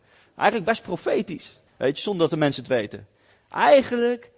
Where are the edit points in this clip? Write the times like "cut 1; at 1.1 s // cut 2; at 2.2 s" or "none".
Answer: cut 1; at 1.7 s